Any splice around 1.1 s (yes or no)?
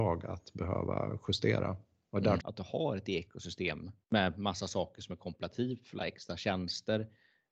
no